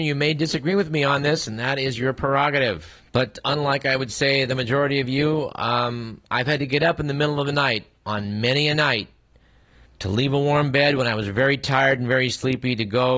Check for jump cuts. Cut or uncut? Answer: cut